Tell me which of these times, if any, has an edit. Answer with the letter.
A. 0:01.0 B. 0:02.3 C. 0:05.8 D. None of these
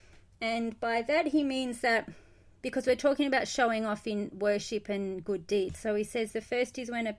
D